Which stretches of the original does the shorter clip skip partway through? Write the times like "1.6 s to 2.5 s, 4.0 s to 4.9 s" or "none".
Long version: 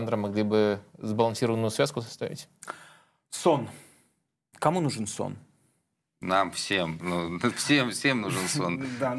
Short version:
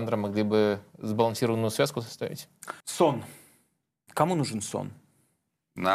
2.8 s to 3.3 s